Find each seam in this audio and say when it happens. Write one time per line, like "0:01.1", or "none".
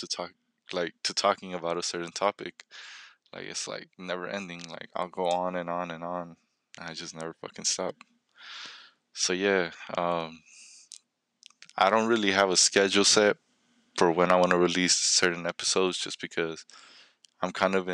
none